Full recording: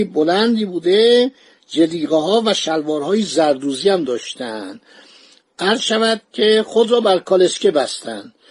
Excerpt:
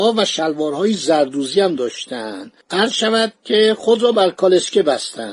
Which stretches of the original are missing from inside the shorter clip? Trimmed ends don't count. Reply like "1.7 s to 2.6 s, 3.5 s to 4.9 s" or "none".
4.9 s to 5.5 s